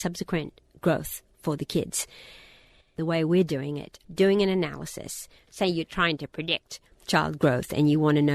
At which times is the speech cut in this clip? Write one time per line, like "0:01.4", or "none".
0:04.0
0:05.4